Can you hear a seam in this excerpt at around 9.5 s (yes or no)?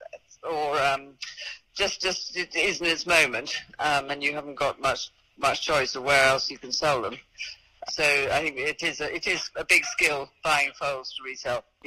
yes